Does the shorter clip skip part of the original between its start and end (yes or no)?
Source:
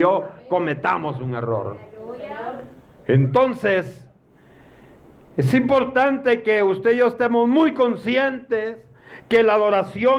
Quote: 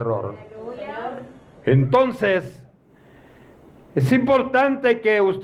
no